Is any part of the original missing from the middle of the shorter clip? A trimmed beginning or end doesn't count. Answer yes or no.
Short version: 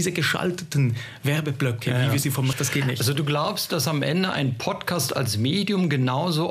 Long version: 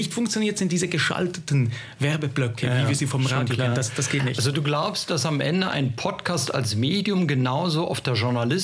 yes